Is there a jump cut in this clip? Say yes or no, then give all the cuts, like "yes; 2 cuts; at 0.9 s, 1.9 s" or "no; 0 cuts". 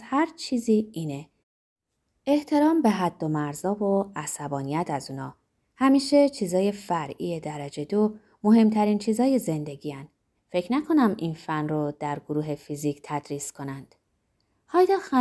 yes; 1 cut; at 10.3 s